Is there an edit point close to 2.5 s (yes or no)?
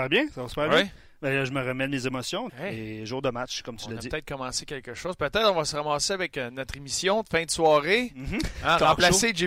yes